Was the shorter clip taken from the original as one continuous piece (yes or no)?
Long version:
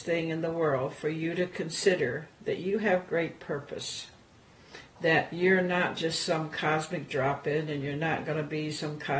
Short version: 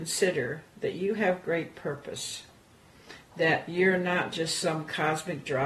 yes